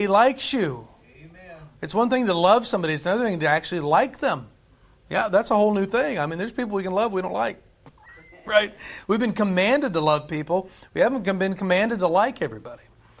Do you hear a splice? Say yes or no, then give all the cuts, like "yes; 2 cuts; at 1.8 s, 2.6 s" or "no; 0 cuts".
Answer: no; 0 cuts